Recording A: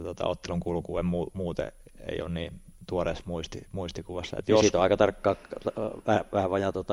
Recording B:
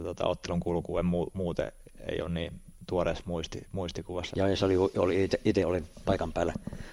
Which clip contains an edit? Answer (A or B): B